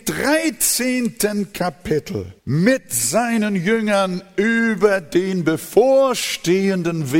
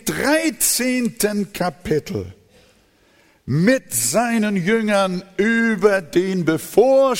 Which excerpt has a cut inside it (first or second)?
first